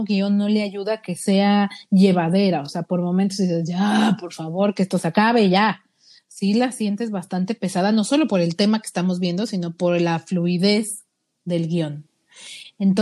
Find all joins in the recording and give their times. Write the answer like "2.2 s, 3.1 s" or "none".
none